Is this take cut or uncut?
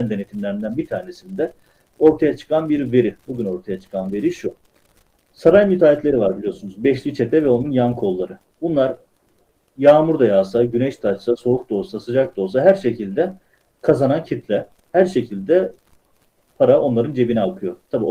uncut